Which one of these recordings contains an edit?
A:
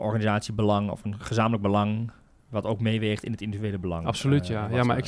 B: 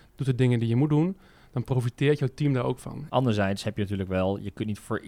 B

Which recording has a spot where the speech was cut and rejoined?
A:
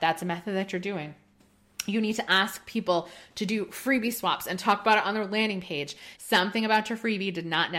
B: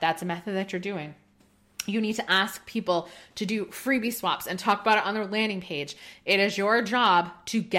A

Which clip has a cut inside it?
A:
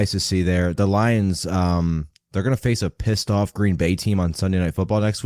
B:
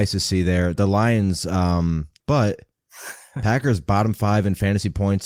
B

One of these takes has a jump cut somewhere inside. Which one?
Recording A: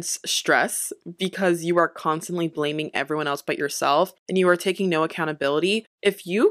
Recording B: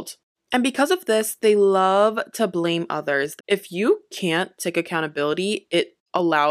B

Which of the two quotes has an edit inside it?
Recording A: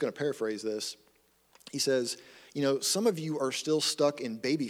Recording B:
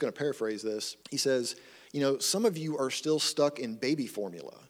B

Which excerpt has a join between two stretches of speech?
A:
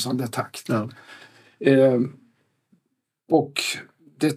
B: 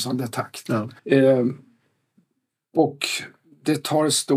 B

